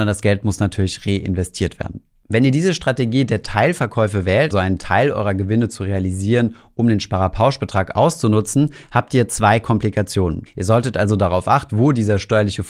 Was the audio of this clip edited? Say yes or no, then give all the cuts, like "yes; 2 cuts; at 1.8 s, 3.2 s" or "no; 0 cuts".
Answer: yes; 3 cuts; at 4.5 s, 10.5 s, 11.7 s